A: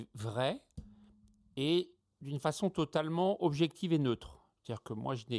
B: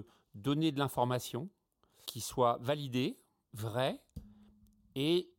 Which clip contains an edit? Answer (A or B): B